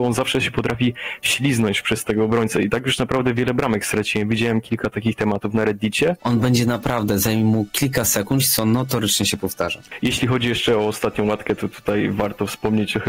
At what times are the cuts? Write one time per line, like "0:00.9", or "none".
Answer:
0:06.2
0:08.4

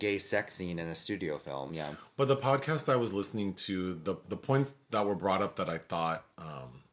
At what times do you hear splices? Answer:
none

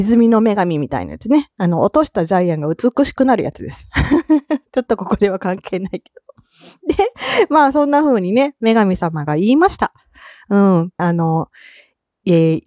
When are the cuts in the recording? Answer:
0:11.0

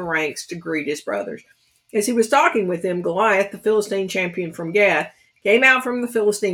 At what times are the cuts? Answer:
none

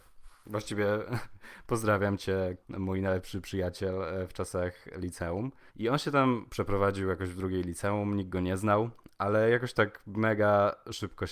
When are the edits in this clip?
0:02.6
0:05.7

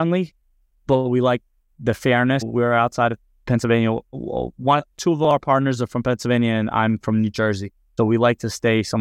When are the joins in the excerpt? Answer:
0:02.4
0:08.0

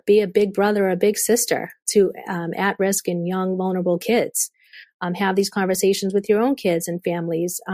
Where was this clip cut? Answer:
none

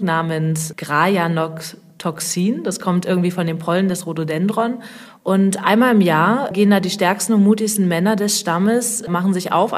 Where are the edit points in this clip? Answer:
0:05.2

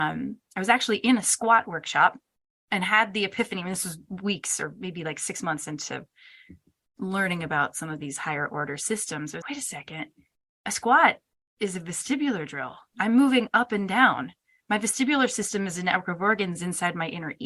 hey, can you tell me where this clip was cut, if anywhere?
0:09.4

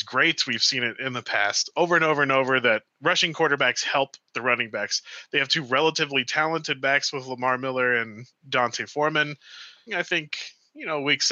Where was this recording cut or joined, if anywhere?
0:09.9

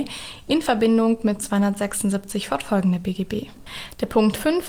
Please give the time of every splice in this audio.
none

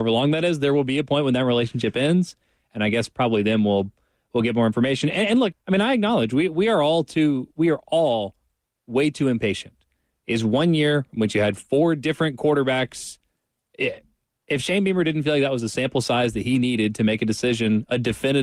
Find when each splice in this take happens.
0:05.5

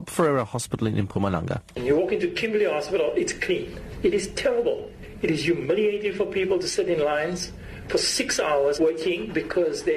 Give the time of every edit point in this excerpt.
0:03.9
0:08.8

